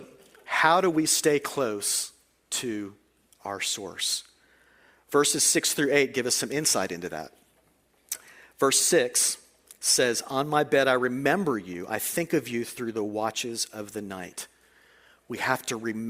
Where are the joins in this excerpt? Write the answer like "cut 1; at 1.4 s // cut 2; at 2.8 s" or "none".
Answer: none